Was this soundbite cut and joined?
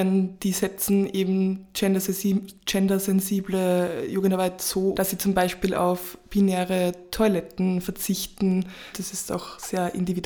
yes; 2 cuts; at 4.9 s, 8.9 s

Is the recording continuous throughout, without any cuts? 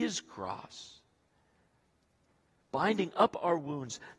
no; 1 cut; at 2.7 s

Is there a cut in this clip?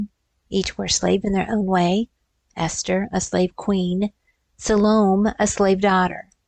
no; 0 cuts

